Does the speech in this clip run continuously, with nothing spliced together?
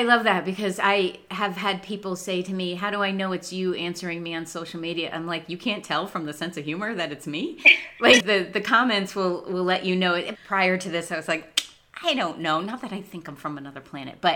no; 2 cuts; at 8.2 s, 10.3 s

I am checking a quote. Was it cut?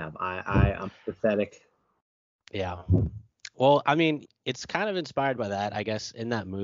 no; 0 cuts

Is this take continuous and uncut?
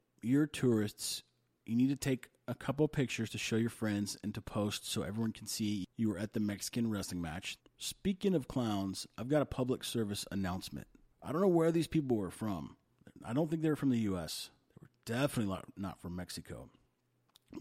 no; 2 cuts; at 7.6 s, 11.1 s

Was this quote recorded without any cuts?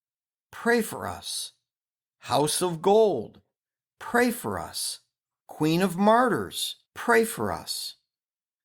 no; 2 cuts; at 5.4 s, 6.9 s

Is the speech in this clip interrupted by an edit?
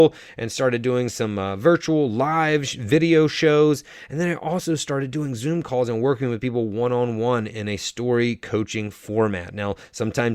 no; 0 cuts

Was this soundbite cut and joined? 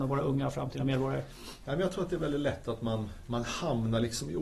no; 0 cuts

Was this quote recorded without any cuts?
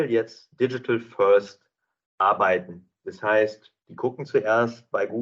yes; 0 cuts

